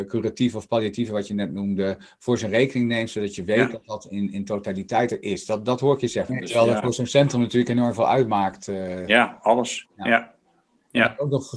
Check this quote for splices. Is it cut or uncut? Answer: cut